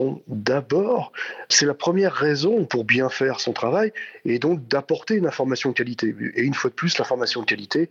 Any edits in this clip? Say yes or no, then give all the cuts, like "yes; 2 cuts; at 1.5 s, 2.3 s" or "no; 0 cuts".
no; 0 cuts